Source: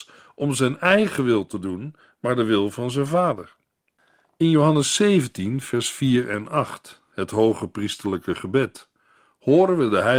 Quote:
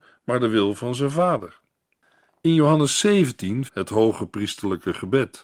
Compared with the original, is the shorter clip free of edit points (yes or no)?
no